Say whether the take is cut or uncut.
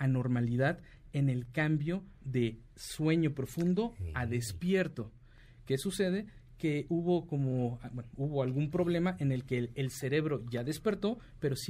uncut